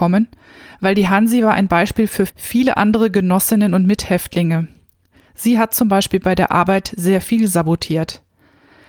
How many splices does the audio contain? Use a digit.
1